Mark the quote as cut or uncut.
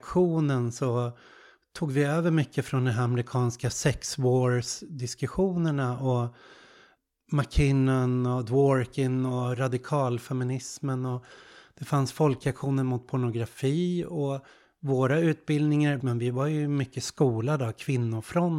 cut